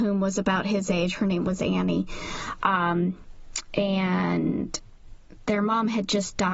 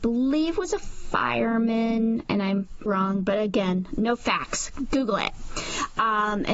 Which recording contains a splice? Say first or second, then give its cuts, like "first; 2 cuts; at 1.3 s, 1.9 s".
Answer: second; 1 cut; at 2.9 s